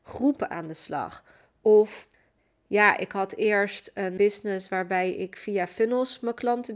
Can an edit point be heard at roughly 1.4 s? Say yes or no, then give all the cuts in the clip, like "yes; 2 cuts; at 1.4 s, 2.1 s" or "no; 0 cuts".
no; 0 cuts